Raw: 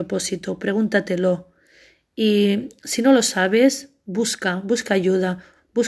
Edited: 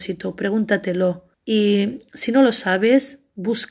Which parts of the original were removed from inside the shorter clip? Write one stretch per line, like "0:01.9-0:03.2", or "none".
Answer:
0:01.6-0:02.0

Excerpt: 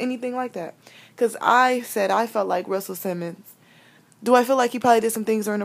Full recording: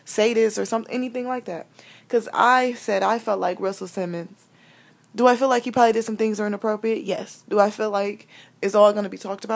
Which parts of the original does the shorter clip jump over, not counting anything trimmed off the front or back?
none

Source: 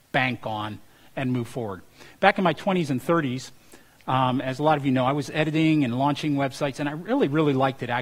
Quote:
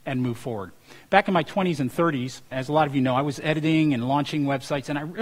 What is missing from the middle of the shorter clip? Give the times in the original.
0:03.6-0:04.4

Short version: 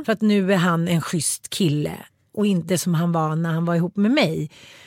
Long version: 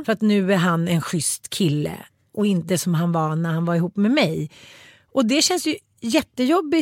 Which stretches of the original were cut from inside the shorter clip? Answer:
none

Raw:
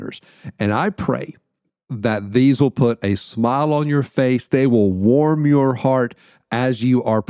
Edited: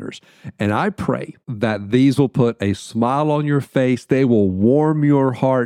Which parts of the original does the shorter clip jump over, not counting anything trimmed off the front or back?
0:01.4-0:01.8

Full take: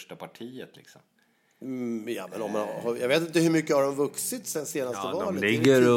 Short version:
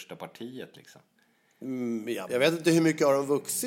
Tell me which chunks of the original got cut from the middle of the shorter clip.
0:02.3-0:03.0

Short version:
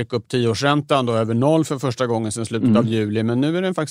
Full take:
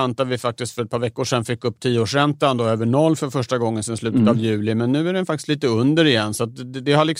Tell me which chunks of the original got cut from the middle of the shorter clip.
none

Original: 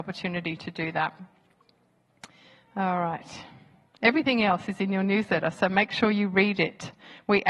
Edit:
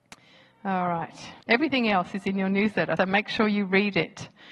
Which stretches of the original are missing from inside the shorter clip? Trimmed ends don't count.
0:03.5-0:03.9
0:05.5-0:05.6

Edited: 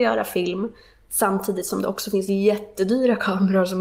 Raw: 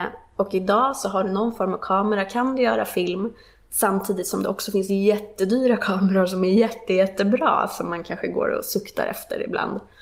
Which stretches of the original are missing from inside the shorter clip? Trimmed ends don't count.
none

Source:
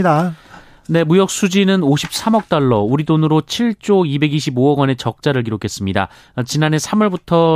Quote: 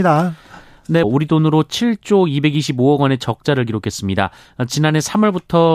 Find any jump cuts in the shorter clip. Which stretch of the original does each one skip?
0:01.0-0:02.8

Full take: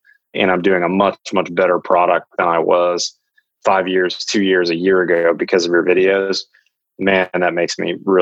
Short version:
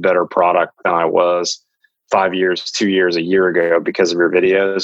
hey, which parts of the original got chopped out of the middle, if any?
none

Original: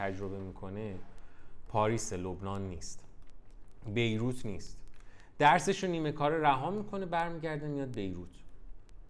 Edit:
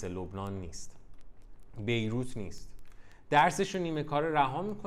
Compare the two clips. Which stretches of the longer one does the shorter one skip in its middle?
none

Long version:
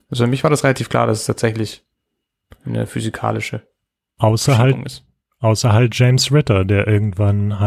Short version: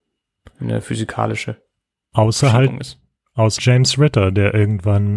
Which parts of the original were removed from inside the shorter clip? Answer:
0:05.6-0:05.9

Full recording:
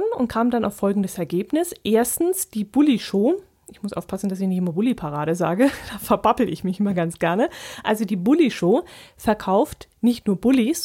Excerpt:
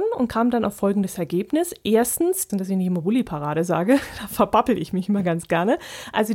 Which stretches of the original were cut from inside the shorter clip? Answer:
0:02.5-0:04.2

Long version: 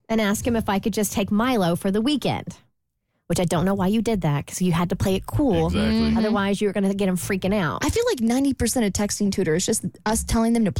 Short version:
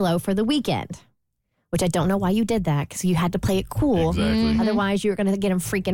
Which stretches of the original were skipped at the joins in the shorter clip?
none

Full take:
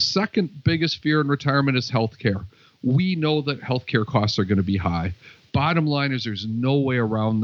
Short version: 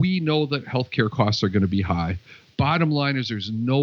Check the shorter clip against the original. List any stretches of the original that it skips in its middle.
none

